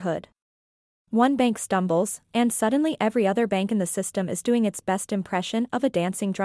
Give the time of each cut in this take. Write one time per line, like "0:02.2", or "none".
0:01.0